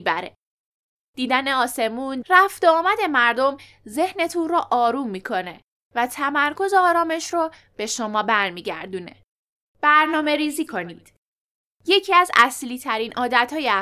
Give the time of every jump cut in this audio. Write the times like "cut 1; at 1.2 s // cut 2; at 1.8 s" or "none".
cut 1; at 1.1 s // cut 2; at 2.2 s // cut 3; at 9.6 s